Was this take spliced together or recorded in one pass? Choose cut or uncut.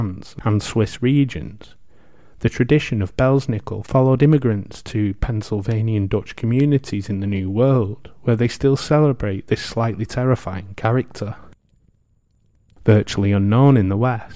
cut